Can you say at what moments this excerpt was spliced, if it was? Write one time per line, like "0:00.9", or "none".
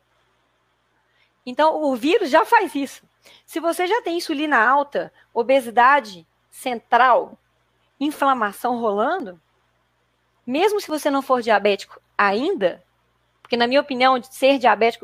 none